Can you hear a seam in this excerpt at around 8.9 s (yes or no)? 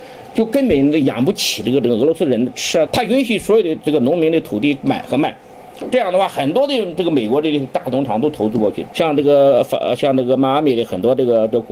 yes